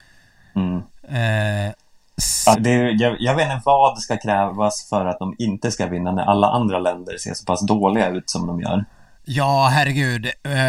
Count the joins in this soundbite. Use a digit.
1